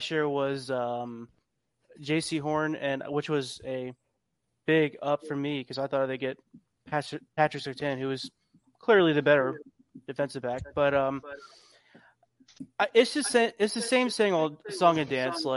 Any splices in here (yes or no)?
no